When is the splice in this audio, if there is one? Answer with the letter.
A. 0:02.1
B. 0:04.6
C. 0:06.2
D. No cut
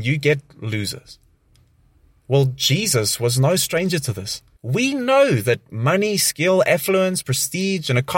B